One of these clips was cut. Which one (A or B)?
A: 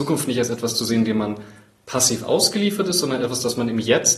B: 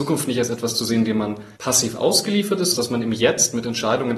B